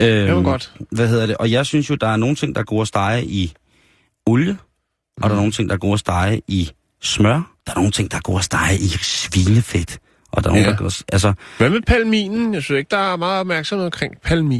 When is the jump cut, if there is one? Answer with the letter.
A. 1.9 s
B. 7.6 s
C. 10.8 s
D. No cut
B